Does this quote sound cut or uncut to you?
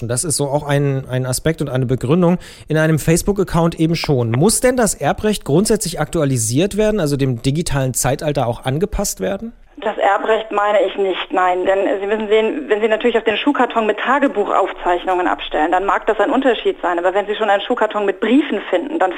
uncut